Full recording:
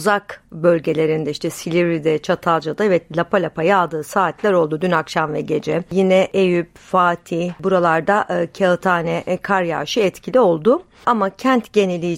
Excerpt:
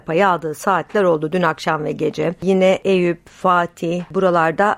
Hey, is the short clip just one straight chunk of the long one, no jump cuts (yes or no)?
yes